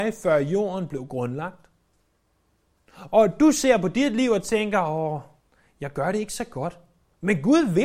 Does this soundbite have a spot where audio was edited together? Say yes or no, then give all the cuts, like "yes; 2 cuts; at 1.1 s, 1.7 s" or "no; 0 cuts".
no; 0 cuts